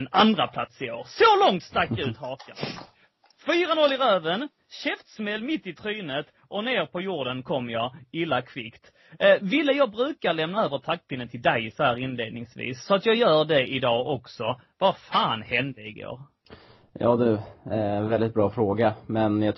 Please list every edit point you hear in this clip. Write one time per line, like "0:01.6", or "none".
none